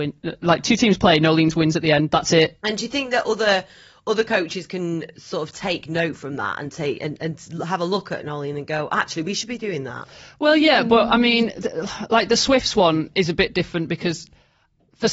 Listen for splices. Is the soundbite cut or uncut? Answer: uncut